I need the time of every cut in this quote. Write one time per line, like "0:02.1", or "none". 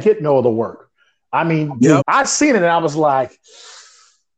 0:02.0